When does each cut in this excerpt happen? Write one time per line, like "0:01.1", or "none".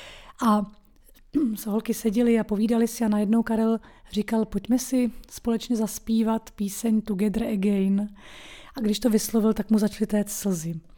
none

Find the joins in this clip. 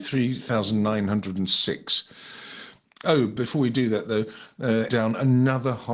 0:03.0
0:04.9

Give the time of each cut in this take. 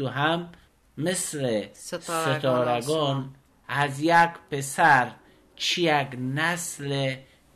0:03.5

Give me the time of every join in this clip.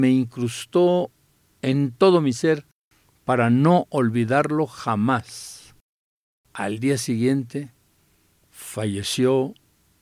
0:06.4
0:08.4

